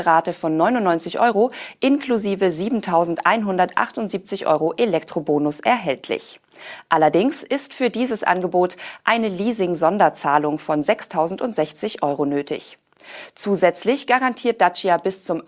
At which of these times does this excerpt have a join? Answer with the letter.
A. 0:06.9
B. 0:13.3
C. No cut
C